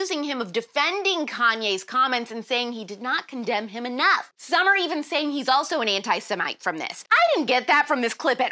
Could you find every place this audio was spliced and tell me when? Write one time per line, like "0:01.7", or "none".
0:04.3